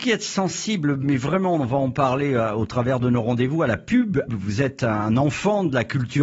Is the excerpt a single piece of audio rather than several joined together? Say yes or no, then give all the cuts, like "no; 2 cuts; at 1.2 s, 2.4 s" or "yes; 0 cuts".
no; 1 cut; at 4.3 s